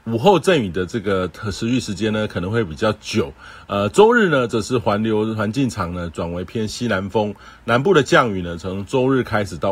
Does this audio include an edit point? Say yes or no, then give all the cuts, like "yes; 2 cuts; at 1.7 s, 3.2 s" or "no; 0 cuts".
no; 0 cuts